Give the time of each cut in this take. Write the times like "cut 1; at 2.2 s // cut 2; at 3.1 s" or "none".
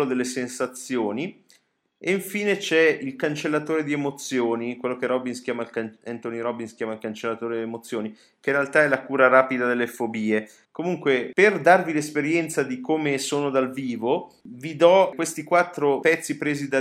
cut 1; at 10.6 s